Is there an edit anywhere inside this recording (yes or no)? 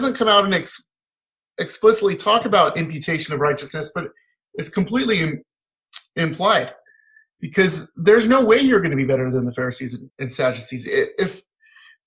yes